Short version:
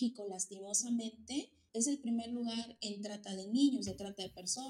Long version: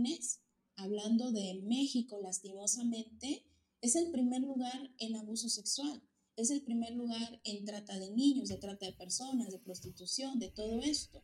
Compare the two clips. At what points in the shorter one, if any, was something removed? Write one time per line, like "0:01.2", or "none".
0:01.7